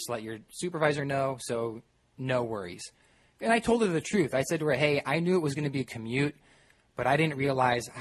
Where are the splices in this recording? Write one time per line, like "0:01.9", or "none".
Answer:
none